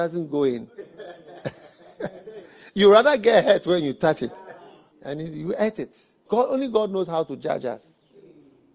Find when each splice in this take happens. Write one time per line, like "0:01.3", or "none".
0:04.9
0:06.3